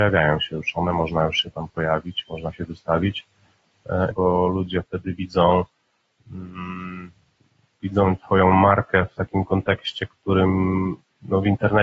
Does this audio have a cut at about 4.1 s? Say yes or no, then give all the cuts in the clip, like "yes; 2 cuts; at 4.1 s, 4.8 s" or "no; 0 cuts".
yes; 1 cut; at 4.1 s